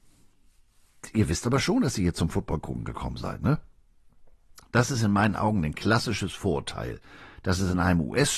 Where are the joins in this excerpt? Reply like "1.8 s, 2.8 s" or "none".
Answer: none